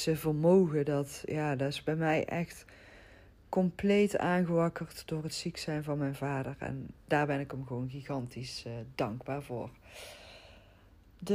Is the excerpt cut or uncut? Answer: uncut